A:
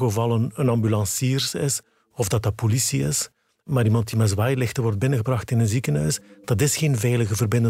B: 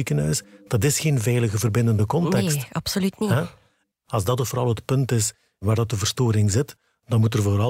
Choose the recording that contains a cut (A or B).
B